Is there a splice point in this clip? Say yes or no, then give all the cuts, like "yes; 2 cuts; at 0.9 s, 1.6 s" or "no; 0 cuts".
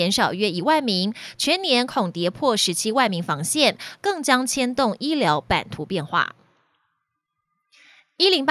no; 0 cuts